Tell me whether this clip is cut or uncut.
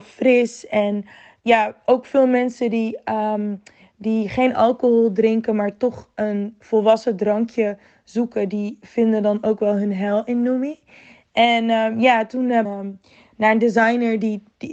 cut